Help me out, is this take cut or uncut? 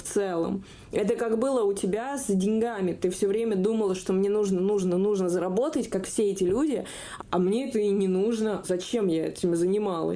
cut